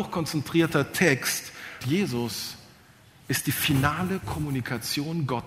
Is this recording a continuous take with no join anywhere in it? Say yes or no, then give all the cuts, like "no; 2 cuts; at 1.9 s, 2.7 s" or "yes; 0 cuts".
no; 1 cut; at 1.8 s